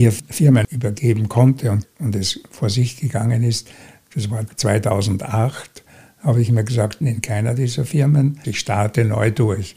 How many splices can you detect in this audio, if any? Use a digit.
2